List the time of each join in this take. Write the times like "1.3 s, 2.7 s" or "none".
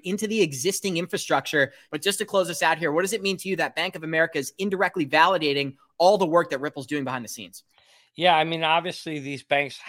1.9 s